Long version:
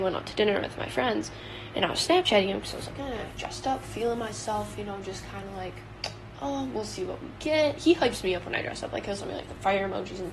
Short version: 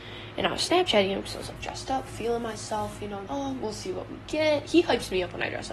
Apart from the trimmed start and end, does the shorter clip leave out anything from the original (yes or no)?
yes